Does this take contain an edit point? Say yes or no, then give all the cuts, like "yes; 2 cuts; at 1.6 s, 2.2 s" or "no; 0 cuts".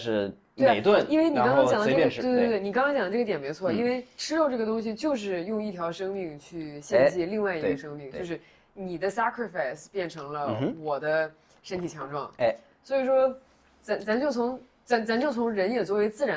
no; 0 cuts